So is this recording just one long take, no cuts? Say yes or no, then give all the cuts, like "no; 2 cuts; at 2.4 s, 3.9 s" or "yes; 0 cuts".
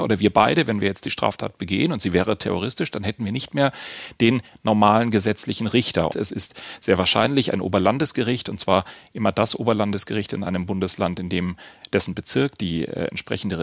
no; 1 cut; at 6.1 s